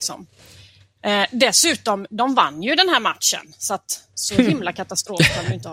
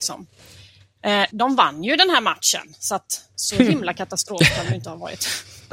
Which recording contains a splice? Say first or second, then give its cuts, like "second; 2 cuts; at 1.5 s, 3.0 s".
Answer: second; 1 cut; at 1.3 s